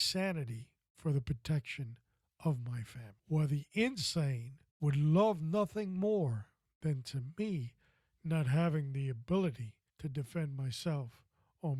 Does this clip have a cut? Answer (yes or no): yes